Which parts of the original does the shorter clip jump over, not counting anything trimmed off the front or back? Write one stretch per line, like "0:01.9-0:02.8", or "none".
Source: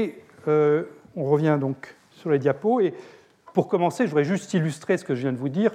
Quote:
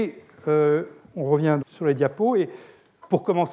0:01.6-0:02.1